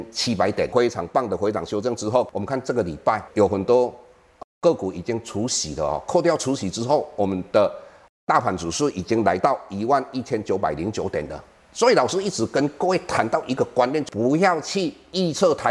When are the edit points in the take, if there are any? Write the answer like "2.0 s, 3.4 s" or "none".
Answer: none